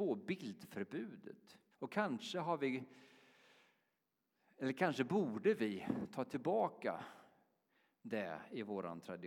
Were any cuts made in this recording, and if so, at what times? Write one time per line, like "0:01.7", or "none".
0:01.7